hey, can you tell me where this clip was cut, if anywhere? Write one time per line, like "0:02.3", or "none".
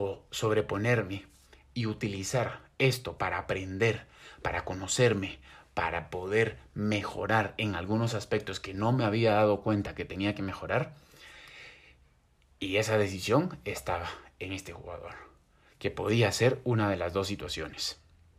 none